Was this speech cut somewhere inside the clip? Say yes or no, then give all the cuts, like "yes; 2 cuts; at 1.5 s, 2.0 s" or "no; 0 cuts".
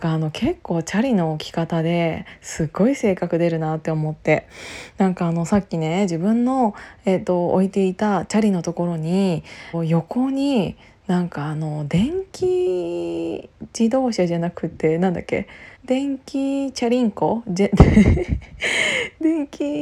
yes; 2 cuts; at 9.7 s, 15.8 s